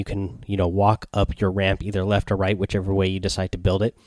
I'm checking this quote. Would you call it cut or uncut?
uncut